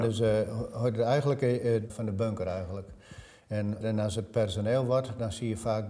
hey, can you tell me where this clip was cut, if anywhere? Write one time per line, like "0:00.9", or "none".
0:01.9